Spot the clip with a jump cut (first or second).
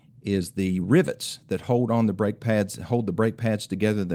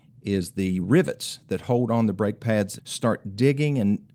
second